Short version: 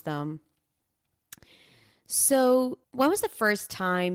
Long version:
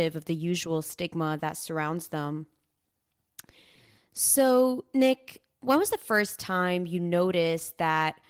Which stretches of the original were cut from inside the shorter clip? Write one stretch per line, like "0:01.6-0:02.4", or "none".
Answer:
0:04.9-0:05.5

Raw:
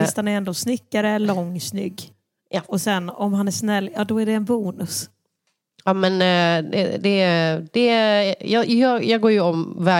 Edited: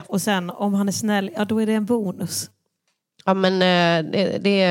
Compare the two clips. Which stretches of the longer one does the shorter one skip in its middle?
none

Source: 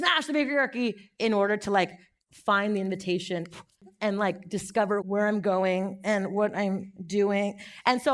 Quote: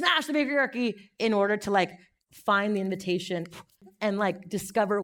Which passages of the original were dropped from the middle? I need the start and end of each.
none

